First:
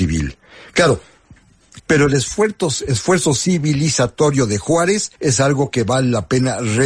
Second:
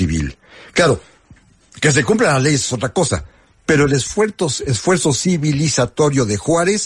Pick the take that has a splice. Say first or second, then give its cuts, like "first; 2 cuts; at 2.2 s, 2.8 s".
first; 2 cuts; at 1.8 s, 5.2 s